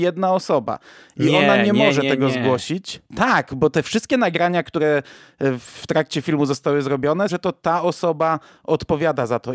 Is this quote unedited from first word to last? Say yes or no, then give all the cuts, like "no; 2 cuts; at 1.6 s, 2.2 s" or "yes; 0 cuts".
no; 1 cut; at 7.3 s